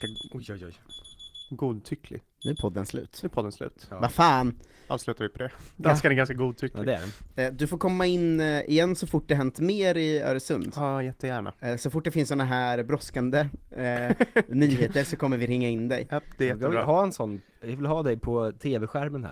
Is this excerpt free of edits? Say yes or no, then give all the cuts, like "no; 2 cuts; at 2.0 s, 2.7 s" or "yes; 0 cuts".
yes; 0 cuts